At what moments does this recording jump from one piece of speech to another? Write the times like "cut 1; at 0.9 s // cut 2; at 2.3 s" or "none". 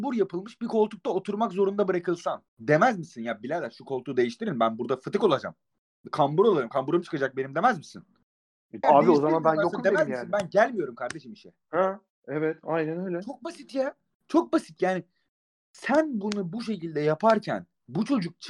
cut 1; at 2.5 s // cut 2; at 8.8 s